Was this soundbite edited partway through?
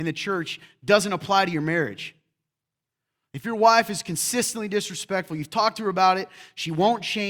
no; 0 cuts

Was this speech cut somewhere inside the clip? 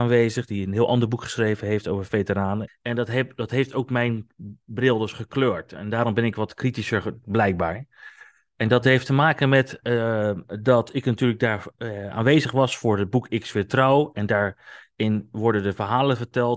yes; 1 cut; at 2.7 s

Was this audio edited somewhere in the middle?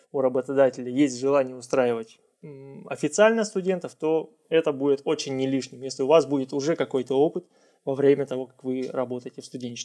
no; 0 cuts

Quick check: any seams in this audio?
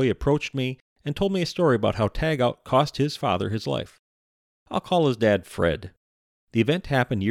no; 0 cuts

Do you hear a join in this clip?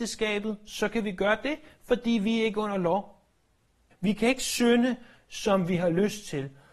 yes; 1 cut; at 3.9 s

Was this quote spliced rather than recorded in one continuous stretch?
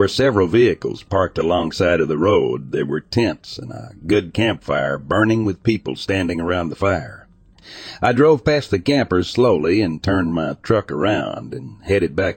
no; 0 cuts

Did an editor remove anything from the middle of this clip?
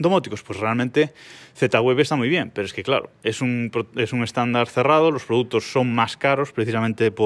no; 0 cuts

